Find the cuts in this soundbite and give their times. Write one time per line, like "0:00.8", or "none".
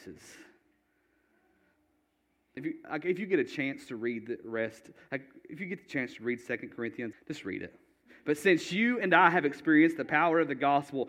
0:02.6
0:07.1